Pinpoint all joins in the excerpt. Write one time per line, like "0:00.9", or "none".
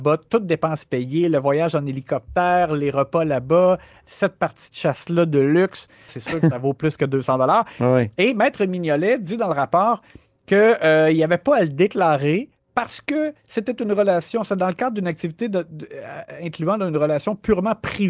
0:06.1